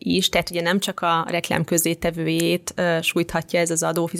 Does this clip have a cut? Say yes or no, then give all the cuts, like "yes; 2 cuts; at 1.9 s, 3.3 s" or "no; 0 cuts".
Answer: no; 0 cuts